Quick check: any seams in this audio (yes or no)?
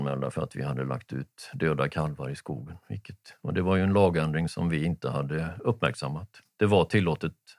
no